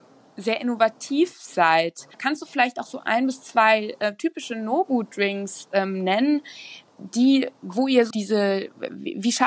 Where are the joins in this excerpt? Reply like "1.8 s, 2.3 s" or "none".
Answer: 8.1 s